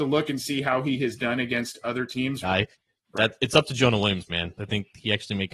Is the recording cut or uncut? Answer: cut